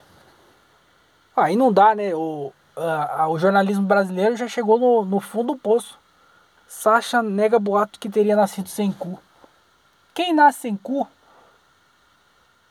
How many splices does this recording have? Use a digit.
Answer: 1